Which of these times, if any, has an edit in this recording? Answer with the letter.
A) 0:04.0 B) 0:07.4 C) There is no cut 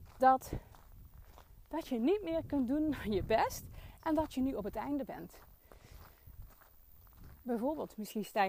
A